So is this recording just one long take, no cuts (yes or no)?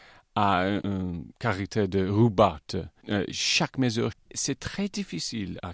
no